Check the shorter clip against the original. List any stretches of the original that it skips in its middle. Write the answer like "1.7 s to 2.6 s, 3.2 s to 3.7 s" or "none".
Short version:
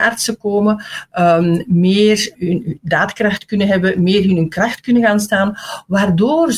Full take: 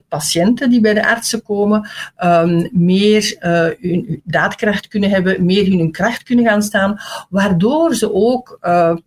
3.4 s to 3.8 s